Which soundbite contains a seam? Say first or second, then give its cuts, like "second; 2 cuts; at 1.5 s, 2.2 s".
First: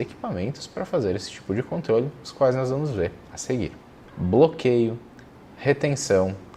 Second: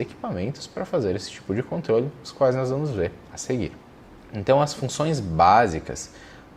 first; 1 cut; at 4.1 s